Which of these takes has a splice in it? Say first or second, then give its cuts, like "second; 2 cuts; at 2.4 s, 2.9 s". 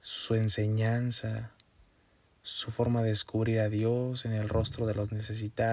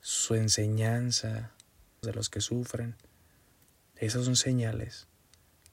second; 1 cut; at 2.0 s